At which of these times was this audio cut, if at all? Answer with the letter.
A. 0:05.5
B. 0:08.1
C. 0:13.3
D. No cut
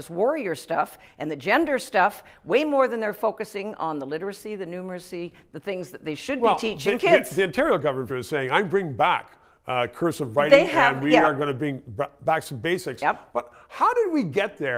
B